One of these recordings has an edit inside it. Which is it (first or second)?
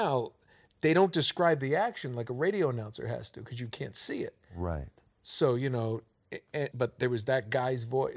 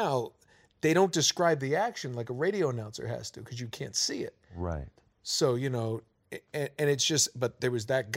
first